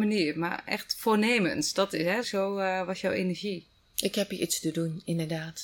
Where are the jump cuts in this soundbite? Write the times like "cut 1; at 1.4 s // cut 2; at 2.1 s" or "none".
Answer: cut 1; at 2.2 s // cut 2; at 3.8 s